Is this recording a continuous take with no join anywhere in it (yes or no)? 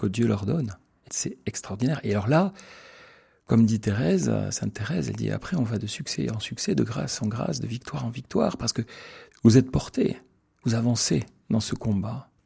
yes